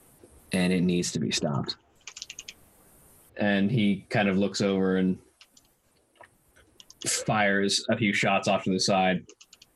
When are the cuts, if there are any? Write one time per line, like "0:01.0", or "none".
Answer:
0:03.3